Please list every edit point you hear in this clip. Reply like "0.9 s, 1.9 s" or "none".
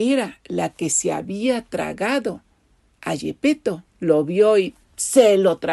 3.9 s